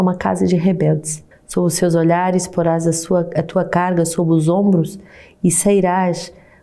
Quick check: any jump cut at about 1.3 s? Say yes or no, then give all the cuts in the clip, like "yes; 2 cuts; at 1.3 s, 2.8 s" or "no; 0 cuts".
yes; 1 cut; at 1.3 s